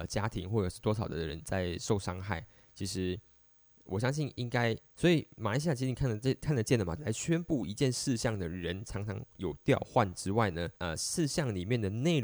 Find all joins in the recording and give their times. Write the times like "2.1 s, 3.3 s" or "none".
4.9 s, 7.0 s, 10.8 s